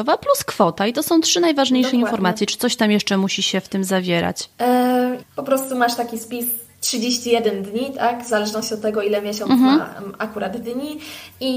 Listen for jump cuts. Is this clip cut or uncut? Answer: cut